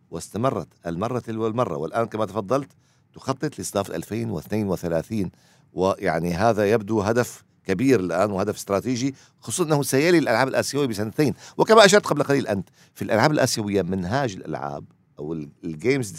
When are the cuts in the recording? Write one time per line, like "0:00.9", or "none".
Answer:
none